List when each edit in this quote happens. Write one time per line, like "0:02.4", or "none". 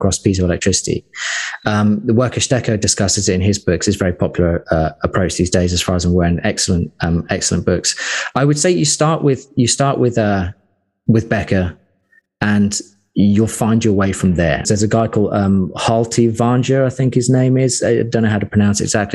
0:14.6